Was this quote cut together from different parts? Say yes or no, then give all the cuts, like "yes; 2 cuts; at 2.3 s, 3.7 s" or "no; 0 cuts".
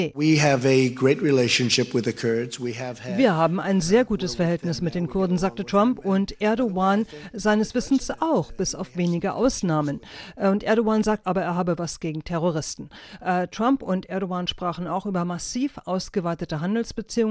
yes; 1 cut; at 11.2 s